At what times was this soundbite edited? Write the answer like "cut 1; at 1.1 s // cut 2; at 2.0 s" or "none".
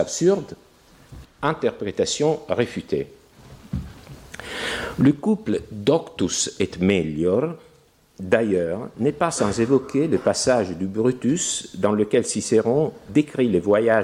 cut 1; at 1.2 s